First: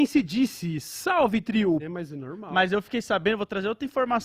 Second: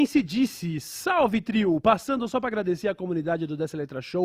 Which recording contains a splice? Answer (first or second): first